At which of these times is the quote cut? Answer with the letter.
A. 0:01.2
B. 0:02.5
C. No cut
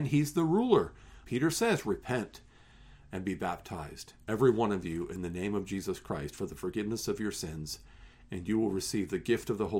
A